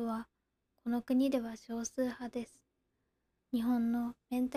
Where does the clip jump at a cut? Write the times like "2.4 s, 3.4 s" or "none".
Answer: 3.4 s